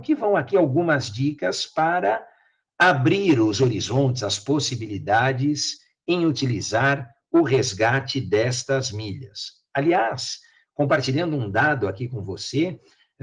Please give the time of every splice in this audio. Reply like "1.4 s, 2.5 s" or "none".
none

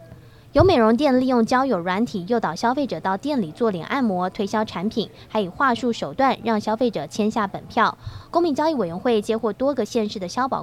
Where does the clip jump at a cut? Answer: none

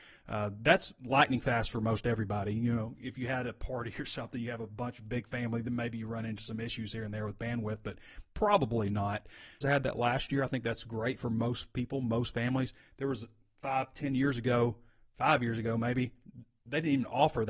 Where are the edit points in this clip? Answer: 9.6 s

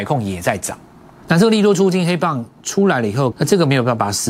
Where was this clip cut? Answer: 1.2 s, 3.3 s

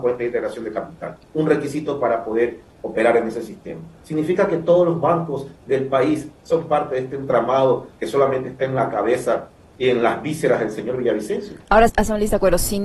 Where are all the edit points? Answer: 11.9 s

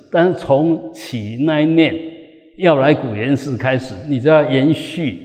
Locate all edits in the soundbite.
none

